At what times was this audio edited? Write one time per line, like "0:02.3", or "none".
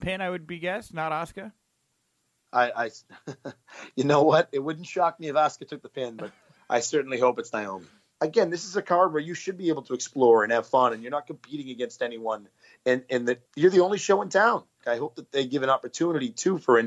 0:08.2
0:13.5
0:14.8